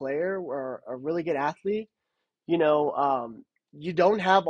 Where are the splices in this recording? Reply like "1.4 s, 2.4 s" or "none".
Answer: none